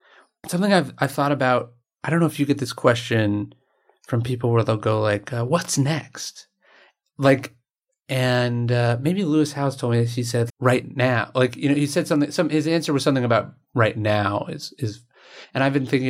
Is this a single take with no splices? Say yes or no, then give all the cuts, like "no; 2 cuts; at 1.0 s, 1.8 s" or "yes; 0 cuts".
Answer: no; 1 cut; at 10.5 s